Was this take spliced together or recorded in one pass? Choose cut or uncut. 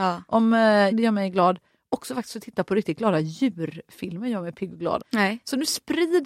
cut